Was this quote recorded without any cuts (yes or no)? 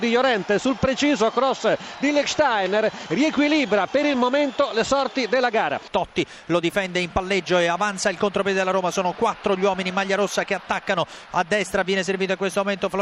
yes